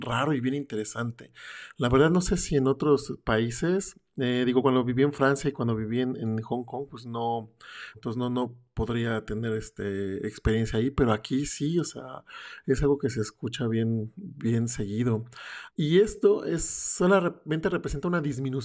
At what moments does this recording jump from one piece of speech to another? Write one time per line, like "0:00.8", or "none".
0:07.9
0:15.7